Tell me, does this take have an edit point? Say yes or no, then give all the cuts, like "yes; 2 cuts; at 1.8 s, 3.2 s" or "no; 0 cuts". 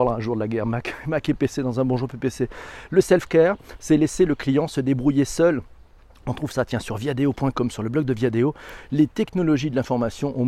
no; 0 cuts